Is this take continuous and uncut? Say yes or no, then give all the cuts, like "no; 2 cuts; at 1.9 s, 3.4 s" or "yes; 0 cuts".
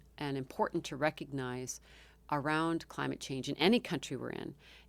yes; 0 cuts